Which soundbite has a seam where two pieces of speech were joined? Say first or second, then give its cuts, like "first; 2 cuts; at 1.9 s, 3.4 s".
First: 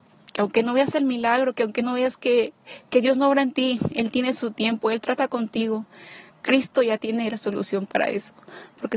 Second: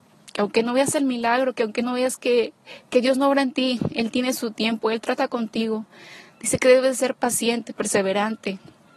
first; 1 cut; at 6.3 s